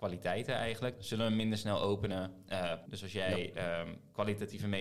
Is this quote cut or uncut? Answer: cut